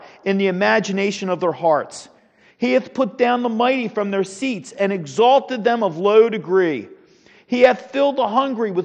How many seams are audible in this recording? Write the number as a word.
zero